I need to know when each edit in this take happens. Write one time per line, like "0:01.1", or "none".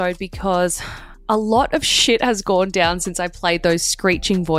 0:01.1